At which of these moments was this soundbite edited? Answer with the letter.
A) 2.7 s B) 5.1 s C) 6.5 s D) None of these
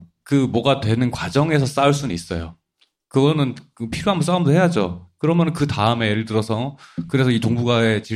D